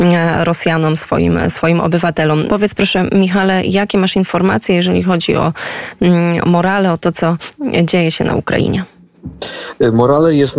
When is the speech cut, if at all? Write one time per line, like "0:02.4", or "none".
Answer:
0:02.5